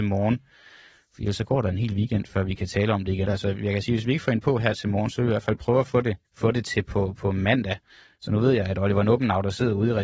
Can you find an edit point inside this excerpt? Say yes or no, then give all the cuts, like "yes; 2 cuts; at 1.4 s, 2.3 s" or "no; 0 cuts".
yes; 2 cuts; at 3.2 s, 6.2 s